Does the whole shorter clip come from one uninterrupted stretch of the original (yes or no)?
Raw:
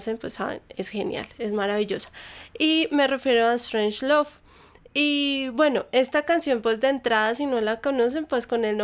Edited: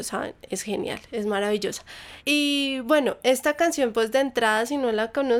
no